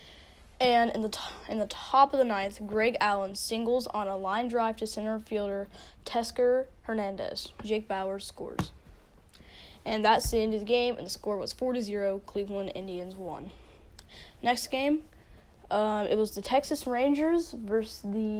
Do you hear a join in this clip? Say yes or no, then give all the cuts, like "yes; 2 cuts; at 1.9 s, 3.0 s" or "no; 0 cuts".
no; 0 cuts